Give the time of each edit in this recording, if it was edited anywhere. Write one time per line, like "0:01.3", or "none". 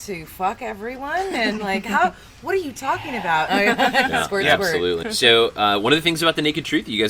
0:03.5
0:05.0